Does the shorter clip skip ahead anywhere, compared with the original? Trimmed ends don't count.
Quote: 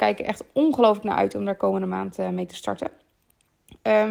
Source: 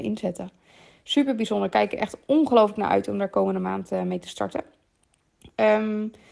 no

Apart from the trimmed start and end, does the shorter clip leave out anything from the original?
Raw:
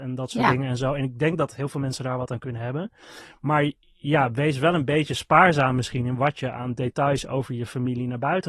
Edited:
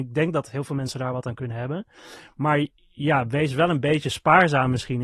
no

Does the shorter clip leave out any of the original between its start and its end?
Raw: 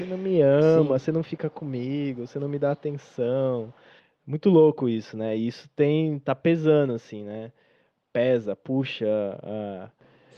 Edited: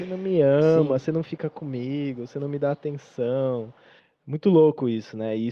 no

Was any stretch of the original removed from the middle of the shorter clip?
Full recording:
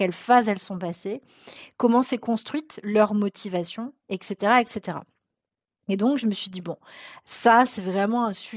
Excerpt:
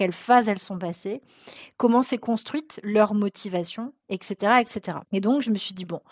yes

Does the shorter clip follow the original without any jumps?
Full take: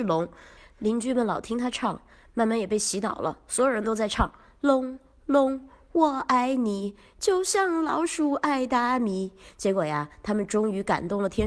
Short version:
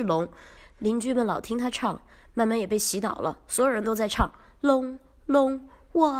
yes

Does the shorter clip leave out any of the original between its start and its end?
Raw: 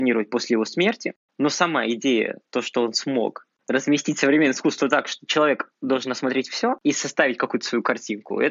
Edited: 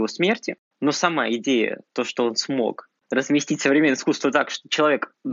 no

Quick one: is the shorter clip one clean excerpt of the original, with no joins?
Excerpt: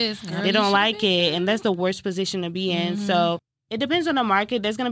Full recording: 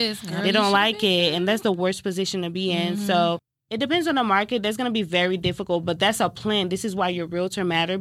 yes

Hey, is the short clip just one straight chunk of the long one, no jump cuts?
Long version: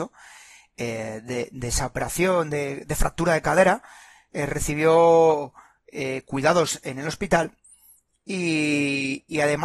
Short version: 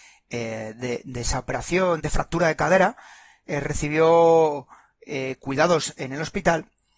no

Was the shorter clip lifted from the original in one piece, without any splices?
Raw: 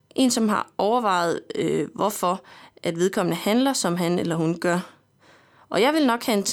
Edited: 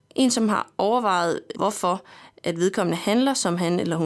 no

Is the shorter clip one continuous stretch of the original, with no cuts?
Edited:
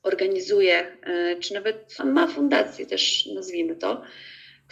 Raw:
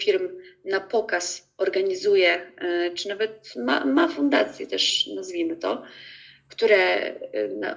no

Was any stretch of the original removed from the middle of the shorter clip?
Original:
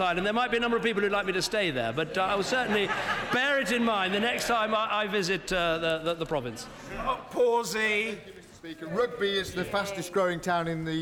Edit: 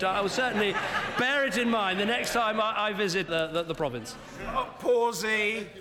yes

